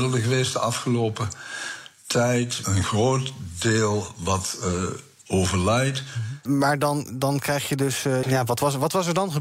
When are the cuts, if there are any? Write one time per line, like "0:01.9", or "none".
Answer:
0:02.6
0:06.5
0:08.2